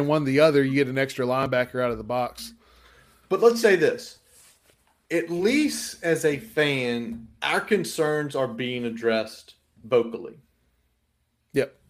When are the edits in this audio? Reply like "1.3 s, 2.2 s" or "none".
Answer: 3.6 s, 7.4 s